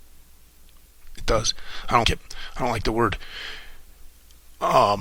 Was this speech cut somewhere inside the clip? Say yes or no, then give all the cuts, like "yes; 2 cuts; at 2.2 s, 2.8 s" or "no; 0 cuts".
yes; 1 cut; at 2.0 s